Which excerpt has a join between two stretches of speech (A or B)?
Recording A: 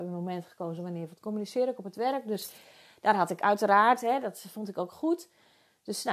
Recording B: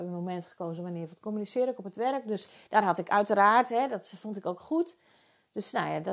B